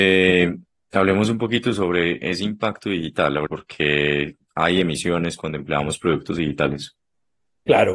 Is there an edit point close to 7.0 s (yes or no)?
no